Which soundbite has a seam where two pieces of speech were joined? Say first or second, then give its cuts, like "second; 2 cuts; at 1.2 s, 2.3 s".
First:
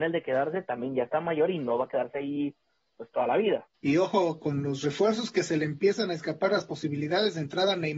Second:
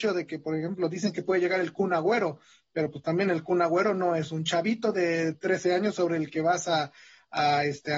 first; 1 cut; at 3.7 s